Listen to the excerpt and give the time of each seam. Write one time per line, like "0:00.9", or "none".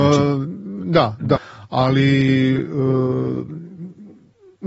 0:01.4